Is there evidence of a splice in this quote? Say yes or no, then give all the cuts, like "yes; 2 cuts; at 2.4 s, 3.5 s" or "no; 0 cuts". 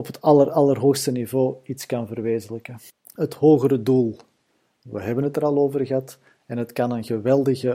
no; 0 cuts